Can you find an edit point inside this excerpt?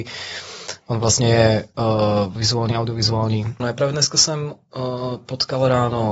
yes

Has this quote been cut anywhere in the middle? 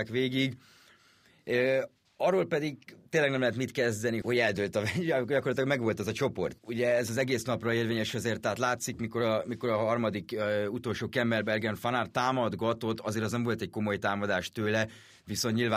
yes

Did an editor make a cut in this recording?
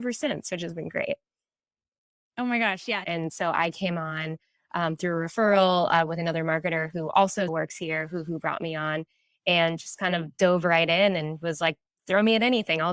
yes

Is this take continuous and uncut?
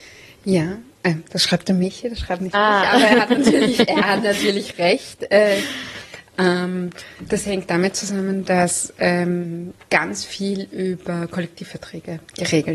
yes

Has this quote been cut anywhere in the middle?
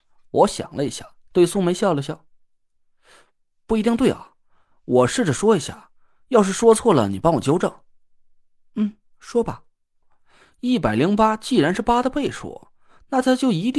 yes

